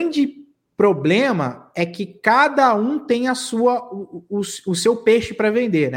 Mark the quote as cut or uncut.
uncut